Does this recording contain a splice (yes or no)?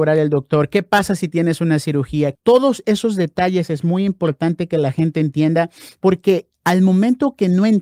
yes